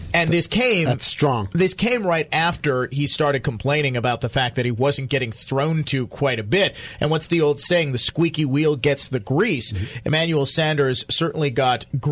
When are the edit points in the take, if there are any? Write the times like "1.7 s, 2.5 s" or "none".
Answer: none